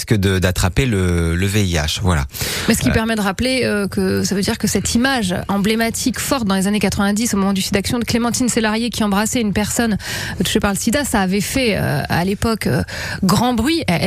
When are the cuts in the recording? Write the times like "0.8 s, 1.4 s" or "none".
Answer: 6.1 s